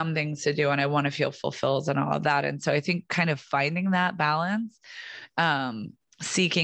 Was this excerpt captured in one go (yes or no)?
yes